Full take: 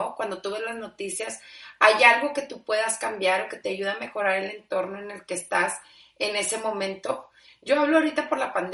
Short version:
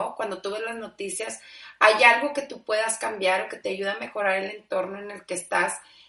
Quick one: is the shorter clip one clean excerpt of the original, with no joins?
yes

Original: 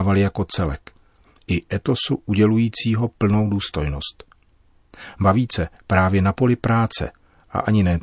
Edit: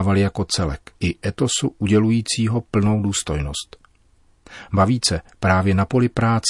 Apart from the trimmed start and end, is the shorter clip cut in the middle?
yes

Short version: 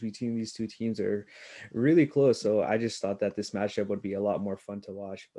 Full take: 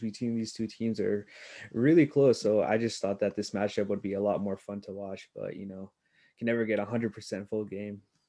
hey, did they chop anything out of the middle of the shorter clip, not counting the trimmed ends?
no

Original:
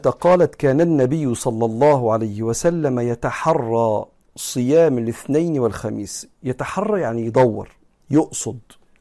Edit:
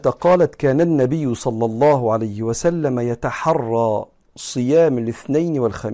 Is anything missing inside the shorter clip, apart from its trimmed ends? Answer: no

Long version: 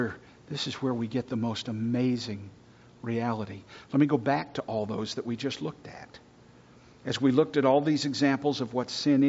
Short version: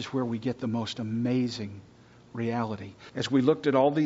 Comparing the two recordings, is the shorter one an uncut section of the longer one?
no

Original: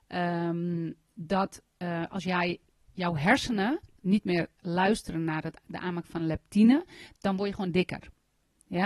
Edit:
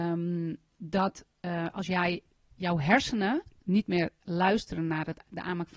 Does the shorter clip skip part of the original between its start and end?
no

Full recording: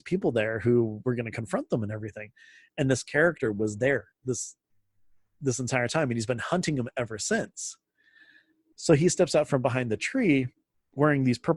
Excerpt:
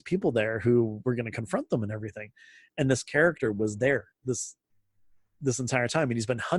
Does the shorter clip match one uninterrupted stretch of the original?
yes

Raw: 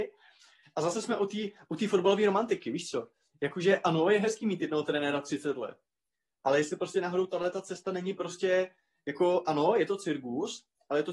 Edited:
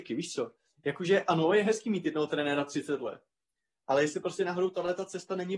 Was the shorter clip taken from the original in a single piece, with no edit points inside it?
yes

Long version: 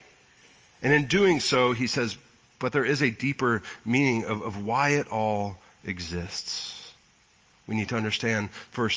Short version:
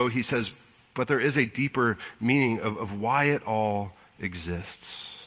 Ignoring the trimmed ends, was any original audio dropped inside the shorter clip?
no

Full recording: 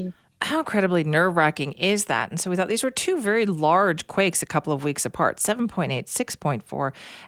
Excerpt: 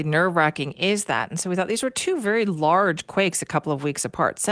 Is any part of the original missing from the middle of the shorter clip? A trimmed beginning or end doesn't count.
no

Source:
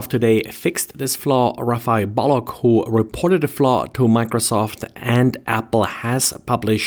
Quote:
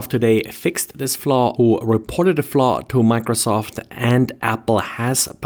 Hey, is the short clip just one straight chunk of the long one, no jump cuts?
no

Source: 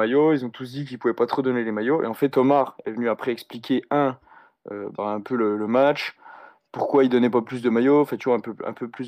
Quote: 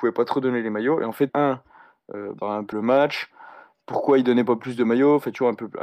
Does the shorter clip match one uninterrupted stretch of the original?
no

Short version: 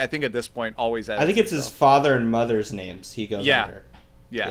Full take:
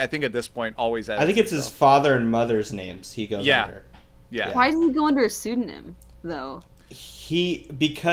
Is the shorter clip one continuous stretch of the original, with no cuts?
yes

